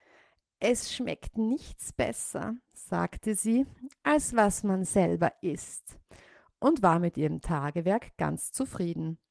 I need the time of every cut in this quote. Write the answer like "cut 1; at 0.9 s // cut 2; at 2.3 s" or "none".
none